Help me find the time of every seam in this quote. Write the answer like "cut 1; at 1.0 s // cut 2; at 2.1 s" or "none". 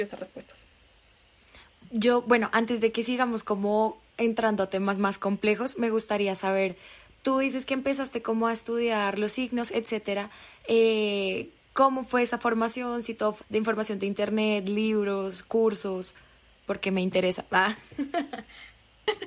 cut 1; at 13.4 s